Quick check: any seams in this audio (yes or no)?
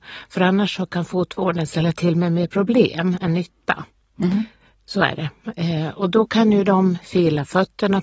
no